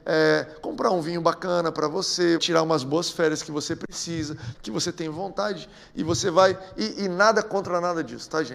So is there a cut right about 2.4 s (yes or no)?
yes